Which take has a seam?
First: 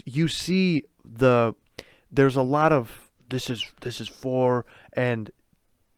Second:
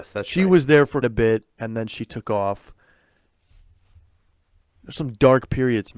second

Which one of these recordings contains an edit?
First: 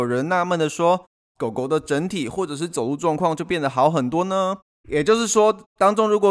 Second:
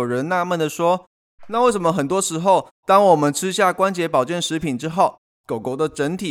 first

